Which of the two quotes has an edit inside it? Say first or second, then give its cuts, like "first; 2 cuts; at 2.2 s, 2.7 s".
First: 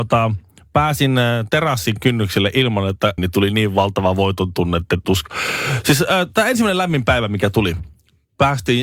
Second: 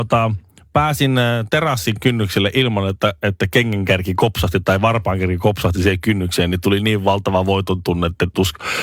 first; 1 cut; at 3.2 s